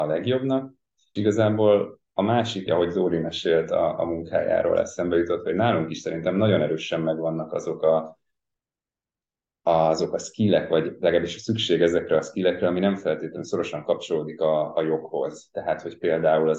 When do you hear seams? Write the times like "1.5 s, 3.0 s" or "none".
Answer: 1.2 s, 2.7 s